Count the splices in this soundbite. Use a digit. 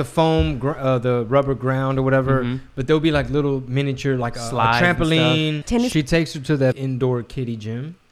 2